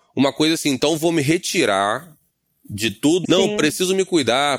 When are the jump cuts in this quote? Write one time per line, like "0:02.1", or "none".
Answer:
0:03.2